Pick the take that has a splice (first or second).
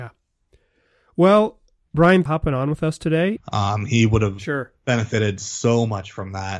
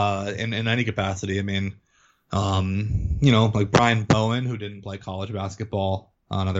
first